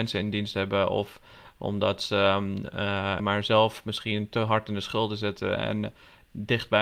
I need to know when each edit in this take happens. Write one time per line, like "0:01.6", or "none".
0:03.2